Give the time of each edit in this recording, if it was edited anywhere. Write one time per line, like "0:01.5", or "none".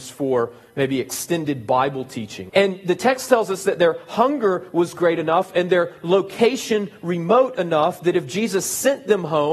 0:02.5